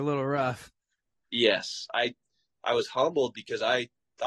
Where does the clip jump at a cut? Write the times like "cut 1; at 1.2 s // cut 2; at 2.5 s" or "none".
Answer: none